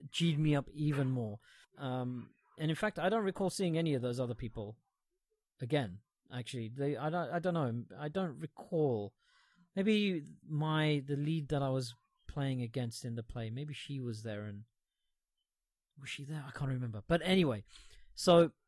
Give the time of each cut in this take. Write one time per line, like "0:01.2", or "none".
0:01.6